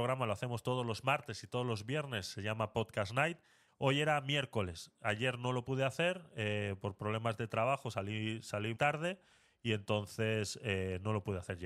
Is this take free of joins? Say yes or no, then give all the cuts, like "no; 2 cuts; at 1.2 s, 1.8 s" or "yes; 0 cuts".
no; 2 cuts; at 3.7 s, 8.7 s